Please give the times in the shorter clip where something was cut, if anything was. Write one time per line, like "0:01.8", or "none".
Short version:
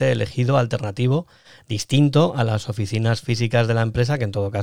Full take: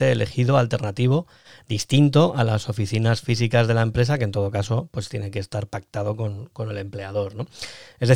none